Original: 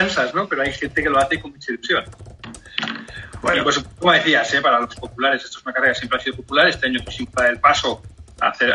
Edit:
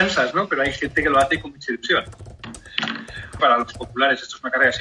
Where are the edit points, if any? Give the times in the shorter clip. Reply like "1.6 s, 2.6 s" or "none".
3.4 s